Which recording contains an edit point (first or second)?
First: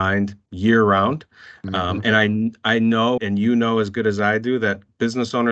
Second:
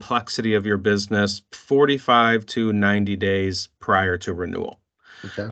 first